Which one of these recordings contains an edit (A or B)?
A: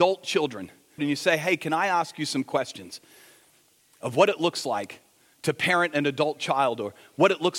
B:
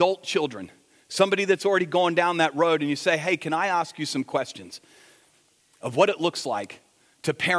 A